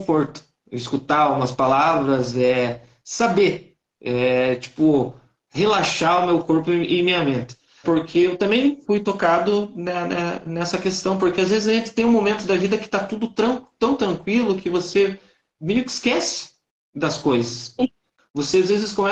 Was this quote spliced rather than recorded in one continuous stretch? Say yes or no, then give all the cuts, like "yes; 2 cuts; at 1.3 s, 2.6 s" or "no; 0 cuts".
yes; 1 cut; at 7.8 s